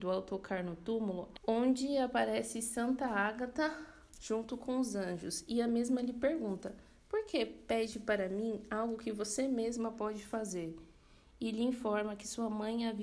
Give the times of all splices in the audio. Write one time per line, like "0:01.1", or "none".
0:01.3

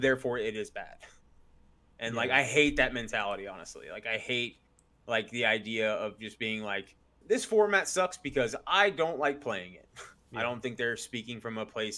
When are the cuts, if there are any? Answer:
0:07.2
0:10.3

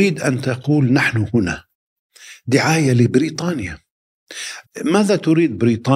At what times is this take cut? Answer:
0:04.6

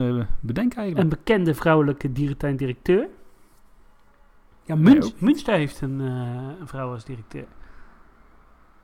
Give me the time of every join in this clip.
none

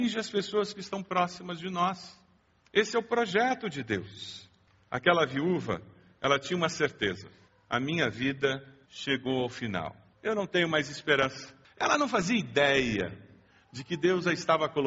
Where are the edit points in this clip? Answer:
none

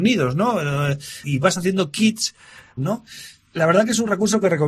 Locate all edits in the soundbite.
0:01.2
0:02.8

